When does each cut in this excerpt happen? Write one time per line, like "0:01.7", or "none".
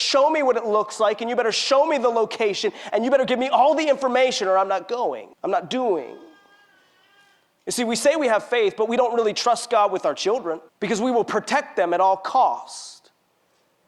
0:05.3
0:10.7